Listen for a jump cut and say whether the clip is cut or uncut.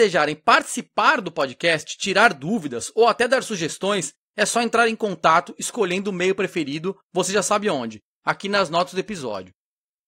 uncut